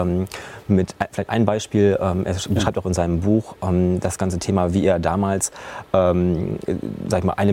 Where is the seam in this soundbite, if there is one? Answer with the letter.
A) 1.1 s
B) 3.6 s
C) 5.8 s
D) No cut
D